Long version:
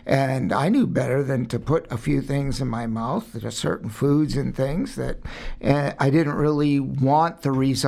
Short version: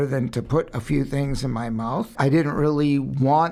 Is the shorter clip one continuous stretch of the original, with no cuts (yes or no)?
no